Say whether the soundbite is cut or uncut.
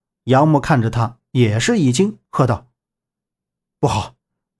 uncut